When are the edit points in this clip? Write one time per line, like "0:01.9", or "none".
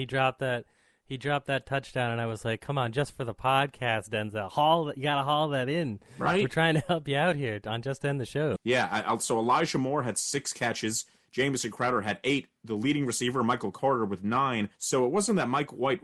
0:08.6
0:14.7